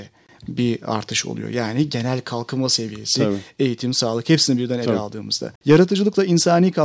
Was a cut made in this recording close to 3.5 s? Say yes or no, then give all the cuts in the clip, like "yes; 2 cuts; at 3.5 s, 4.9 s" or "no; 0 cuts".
no; 1 cut; at 5.6 s